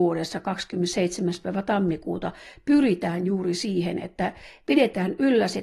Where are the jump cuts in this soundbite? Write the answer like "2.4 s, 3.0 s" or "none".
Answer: none